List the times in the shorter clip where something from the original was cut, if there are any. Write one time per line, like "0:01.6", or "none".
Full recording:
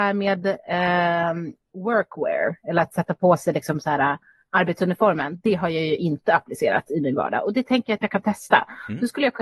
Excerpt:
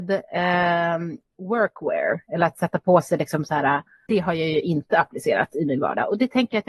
0:04.1